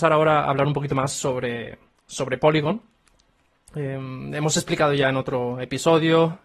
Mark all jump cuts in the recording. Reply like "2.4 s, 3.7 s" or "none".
none